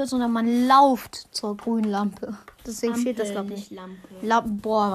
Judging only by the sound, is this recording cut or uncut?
uncut